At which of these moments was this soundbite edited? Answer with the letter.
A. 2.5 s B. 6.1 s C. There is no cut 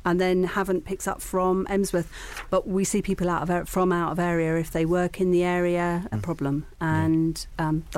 B